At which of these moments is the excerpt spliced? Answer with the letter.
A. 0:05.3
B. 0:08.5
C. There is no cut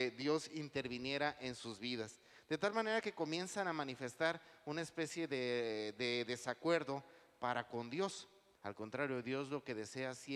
B